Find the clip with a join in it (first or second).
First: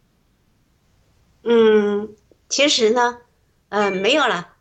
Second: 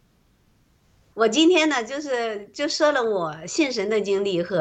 second